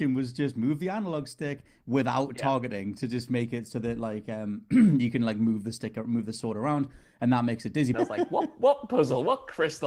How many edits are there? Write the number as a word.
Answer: one